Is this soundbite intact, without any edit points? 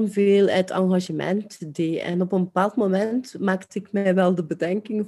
yes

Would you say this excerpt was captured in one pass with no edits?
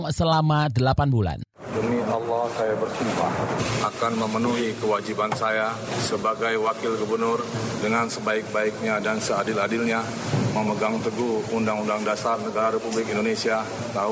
yes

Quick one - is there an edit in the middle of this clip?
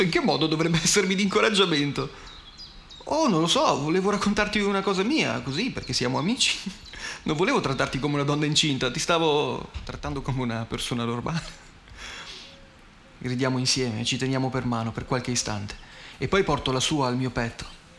no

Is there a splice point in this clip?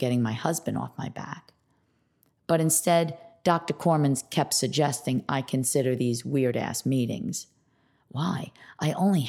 no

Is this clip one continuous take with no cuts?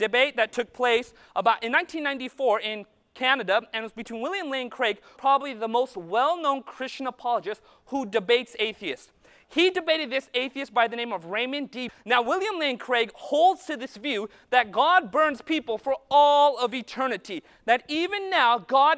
no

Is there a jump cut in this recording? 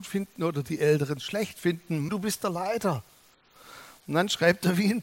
yes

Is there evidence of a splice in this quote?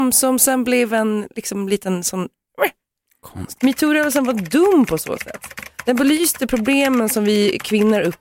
yes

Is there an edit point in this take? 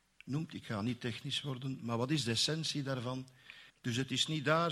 yes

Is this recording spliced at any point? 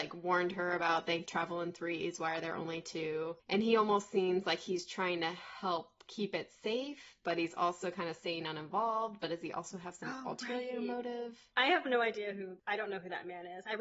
no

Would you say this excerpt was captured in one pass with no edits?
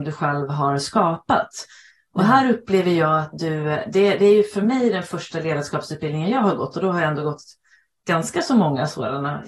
yes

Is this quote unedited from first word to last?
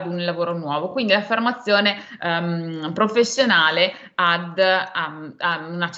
yes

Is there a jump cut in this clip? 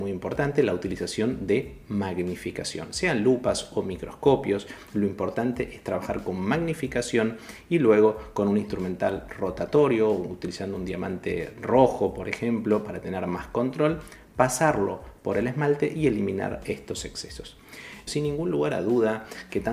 yes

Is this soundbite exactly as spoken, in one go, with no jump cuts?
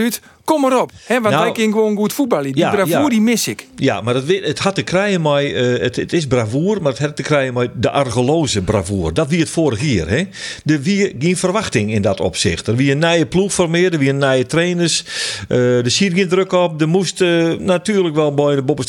yes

